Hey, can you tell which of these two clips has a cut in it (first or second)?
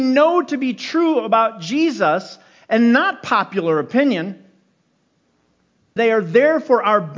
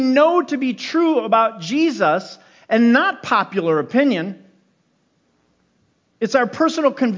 first